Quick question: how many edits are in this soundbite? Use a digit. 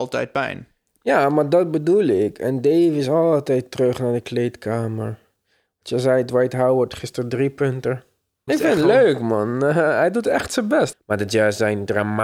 2